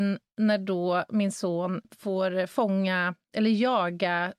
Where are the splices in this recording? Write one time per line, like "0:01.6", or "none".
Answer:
0:01.8